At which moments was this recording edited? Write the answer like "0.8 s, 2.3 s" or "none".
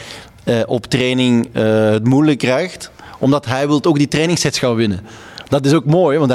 none